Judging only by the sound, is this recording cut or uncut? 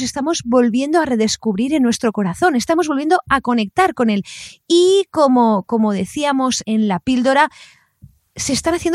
cut